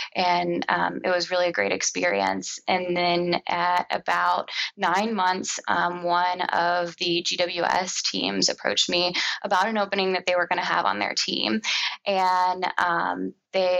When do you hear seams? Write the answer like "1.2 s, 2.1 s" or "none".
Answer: none